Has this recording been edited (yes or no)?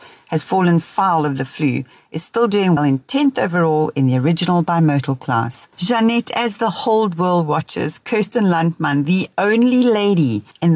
yes